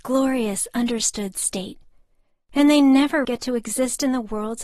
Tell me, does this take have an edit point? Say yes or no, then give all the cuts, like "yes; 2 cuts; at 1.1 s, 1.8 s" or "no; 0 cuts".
yes; 1 cut; at 3.2 s